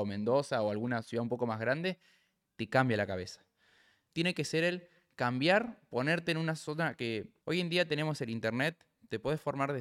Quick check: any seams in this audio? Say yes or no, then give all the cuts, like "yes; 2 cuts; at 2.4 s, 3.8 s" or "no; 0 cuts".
yes; 2 cuts; at 4.1 s, 7.4 s